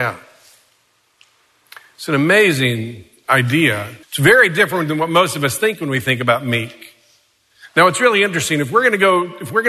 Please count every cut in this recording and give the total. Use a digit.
1